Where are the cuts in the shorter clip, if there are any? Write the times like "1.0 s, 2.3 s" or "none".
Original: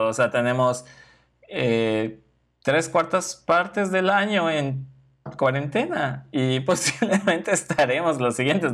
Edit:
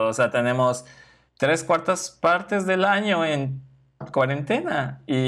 1.3 s